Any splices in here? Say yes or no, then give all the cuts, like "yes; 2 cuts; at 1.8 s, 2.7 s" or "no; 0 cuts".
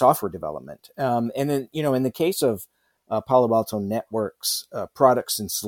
no; 0 cuts